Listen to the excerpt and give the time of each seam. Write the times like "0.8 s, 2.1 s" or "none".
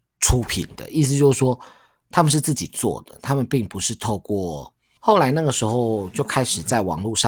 5.0 s